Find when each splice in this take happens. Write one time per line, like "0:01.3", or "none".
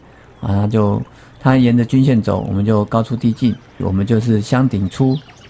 0:03.8